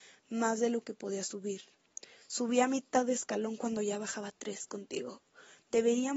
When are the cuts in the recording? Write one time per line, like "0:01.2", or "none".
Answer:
none